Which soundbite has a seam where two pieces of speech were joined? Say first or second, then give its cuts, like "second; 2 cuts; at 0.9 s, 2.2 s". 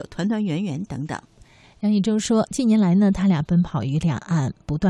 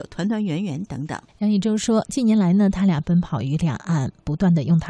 second; 1 cut; at 1.3 s